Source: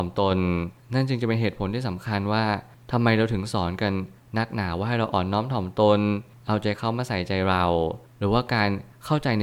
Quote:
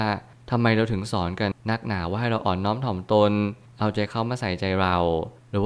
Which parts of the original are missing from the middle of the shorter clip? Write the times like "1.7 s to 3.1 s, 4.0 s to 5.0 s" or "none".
3.9 s to 4.2 s